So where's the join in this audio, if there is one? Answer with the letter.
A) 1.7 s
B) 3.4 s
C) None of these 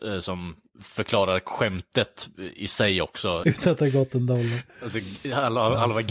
B